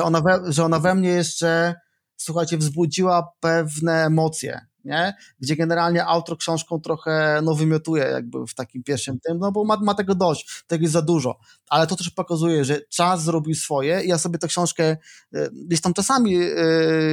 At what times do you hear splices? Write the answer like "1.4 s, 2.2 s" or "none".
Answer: none